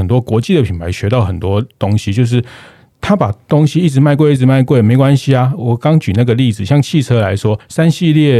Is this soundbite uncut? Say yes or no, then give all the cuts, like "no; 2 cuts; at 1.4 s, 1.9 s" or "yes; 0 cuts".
yes; 0 cuts